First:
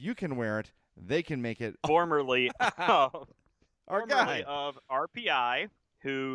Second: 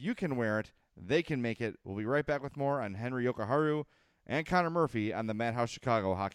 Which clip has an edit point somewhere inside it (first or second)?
first